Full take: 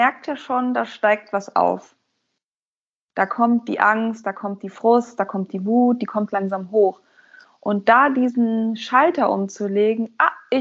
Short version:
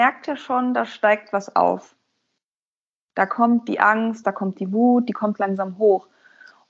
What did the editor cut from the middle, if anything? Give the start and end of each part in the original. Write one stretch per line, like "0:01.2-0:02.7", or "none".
0:04.2-0:05.2